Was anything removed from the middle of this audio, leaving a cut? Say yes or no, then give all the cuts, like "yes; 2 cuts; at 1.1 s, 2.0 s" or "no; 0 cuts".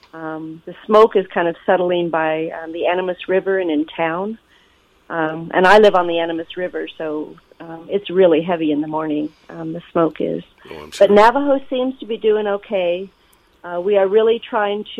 no; 0 cuts